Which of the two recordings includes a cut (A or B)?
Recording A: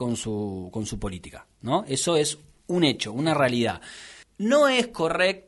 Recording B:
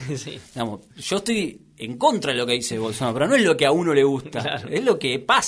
A